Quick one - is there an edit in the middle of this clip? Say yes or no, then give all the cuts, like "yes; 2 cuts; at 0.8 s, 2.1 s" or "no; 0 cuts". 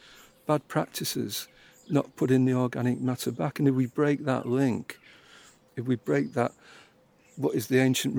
no; 0 cuts